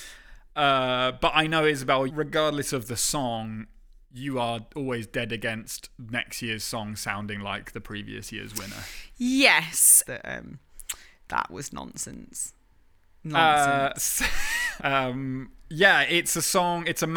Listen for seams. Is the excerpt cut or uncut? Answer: cut